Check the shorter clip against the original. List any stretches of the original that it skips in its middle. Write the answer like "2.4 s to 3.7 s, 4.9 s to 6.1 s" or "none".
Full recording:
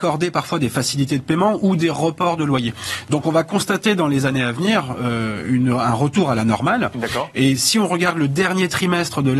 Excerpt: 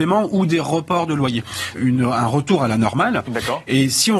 3.0 s to 5.4 s